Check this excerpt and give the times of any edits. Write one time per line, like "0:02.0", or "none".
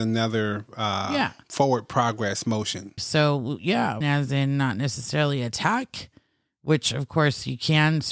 0:03.0
0:04.0